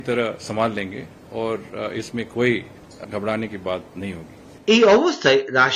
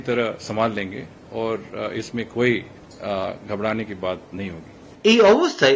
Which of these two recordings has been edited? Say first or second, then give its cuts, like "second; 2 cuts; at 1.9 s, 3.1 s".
first; 1 cut; at 3.0 s